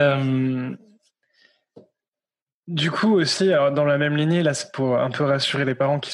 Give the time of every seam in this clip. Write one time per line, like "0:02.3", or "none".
none